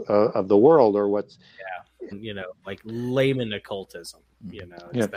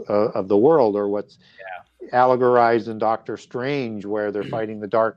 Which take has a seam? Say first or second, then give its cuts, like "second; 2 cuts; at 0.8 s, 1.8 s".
first; 1 cut; at 2.1 s